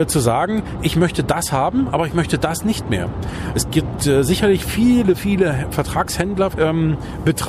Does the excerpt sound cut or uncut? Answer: cut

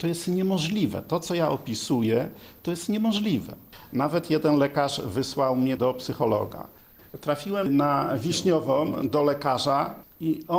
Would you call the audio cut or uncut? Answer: uncut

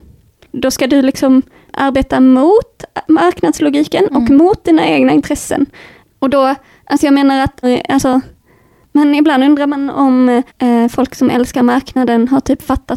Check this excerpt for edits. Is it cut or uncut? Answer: cut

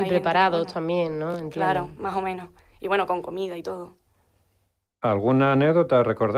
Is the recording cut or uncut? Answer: uncut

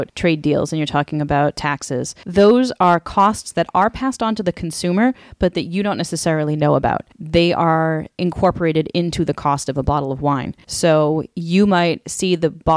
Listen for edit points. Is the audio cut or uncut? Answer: uncut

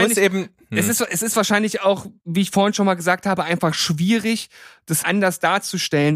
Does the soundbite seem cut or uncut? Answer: cut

